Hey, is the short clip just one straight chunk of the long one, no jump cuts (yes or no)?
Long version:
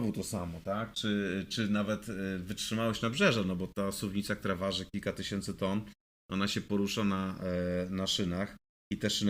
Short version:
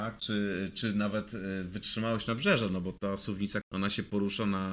no